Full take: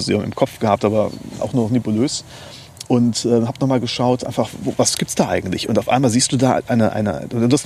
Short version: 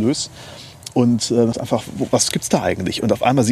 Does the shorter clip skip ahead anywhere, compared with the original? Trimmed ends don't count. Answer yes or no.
yes